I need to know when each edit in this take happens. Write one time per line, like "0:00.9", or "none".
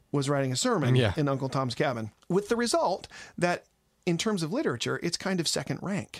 0:02.2

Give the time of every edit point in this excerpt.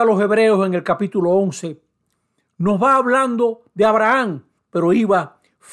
0:04.6

